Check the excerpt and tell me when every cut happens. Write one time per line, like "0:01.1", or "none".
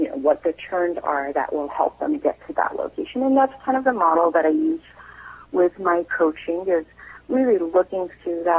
none